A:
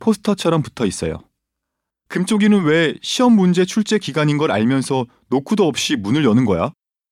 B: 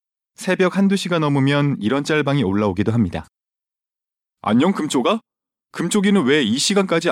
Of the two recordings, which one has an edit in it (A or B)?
A